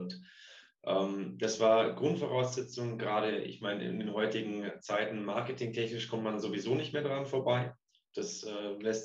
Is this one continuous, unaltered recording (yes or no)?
yes